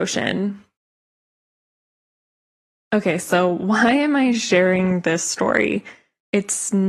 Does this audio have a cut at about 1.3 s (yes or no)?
yes